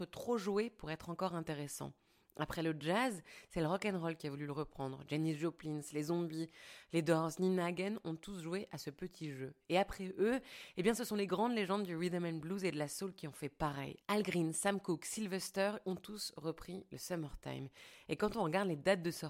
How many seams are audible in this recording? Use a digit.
0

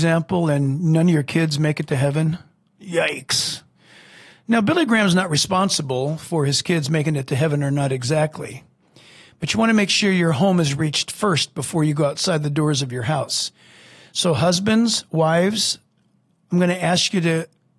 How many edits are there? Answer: 0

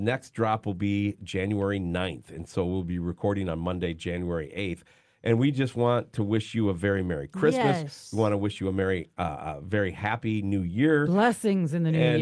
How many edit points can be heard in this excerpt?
0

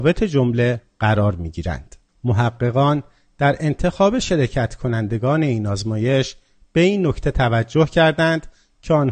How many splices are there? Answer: 1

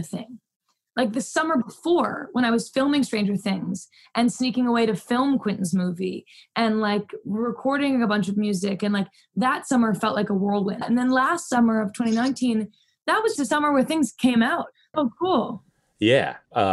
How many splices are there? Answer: 2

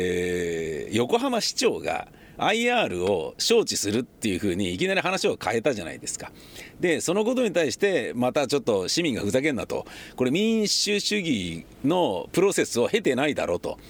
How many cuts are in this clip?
0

